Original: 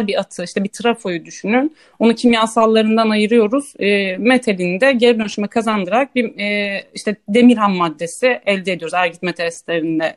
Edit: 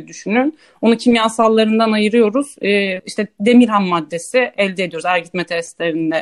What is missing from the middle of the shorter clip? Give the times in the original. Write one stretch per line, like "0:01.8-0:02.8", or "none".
0:04.2-0:06.9